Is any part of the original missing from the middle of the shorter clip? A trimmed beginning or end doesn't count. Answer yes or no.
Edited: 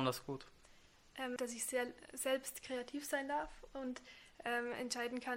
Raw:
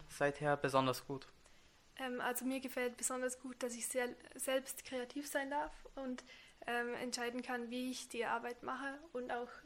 yes